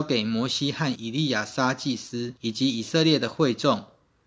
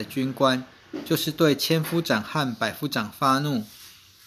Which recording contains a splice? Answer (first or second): first